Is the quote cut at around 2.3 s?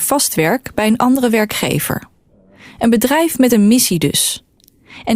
no; 0 cuts

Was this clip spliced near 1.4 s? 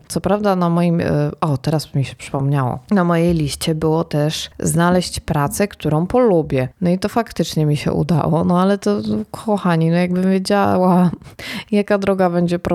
no; 0 cuts

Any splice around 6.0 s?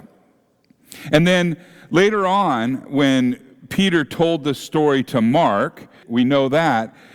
yes; 1 cut; at 6.0 s

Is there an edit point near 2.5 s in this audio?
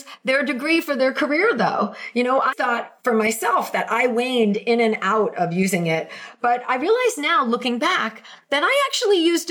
yes; 1 cut; at 2.5 s

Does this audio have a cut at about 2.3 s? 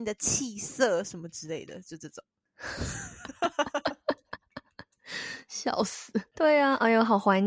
no; 0 cuts

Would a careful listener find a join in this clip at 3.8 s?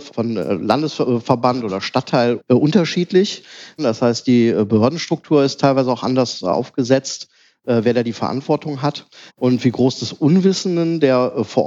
yes; 2 cuts; at 3.8 s, 9.3 s

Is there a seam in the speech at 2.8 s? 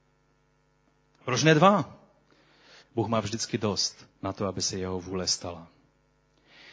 yes; 2 cuts; at 2.8 s, 4.1 s

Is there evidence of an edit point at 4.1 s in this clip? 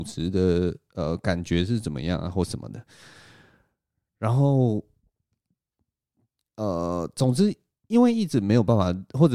no; 0 cuts

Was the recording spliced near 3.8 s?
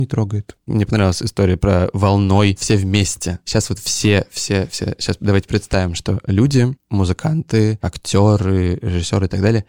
no; 1 cut; at 6.8 s

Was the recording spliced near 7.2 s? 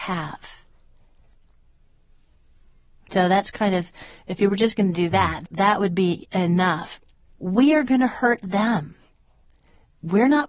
yes; 1 cut; at 7.2 s

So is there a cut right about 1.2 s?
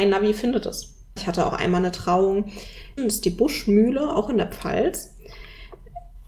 yes; 2 cuts; at 1.2 s, 3.0 s

